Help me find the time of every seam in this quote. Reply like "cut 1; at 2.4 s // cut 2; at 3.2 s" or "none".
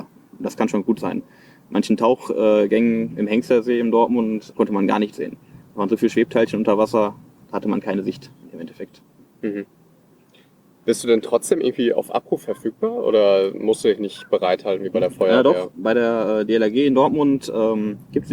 cut 1; at 4.5 s